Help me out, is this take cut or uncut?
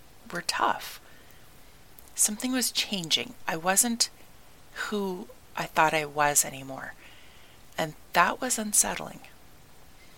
cut